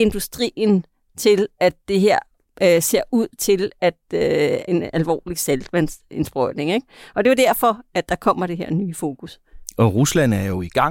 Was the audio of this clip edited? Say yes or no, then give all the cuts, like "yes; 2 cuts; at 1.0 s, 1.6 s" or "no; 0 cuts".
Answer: yes; 1 cut; at 4.7 s